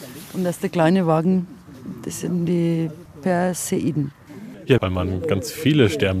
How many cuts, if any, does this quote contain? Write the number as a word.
one